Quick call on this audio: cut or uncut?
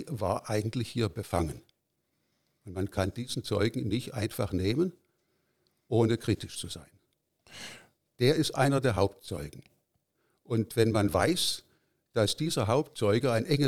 cut